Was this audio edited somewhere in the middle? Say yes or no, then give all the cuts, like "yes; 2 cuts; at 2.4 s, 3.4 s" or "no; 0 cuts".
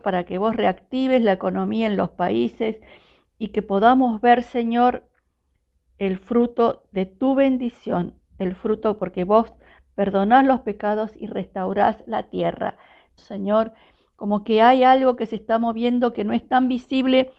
yes; 1 cut; at 13.2 s